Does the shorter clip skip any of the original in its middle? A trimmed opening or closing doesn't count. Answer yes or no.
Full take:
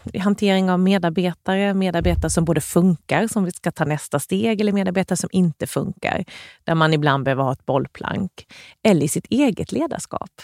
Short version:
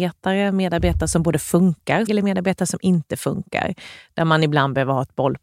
yes